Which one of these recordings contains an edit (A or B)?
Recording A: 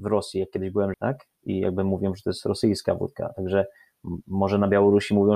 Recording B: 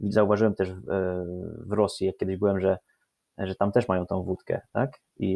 A